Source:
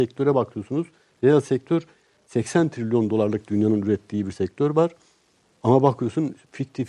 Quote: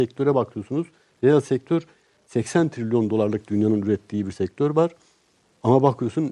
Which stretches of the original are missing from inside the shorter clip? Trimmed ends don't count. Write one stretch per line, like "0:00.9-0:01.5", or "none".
none